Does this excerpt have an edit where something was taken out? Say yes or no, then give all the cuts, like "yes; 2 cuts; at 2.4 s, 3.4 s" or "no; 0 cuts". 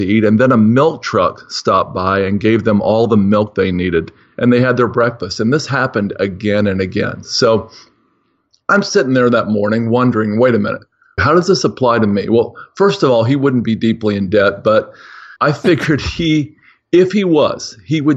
yes; 2 cuts; at 11.2 s, 15.4 s